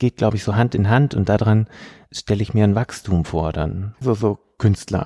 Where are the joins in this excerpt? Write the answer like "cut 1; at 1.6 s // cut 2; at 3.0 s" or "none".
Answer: cut 1; at 4.0 s